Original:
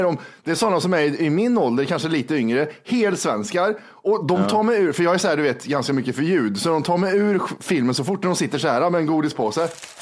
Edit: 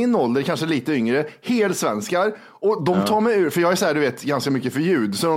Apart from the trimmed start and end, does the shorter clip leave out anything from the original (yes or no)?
no